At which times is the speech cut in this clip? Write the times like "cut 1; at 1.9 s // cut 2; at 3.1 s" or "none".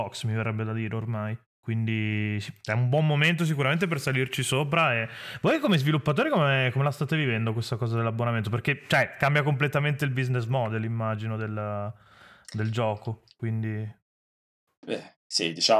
none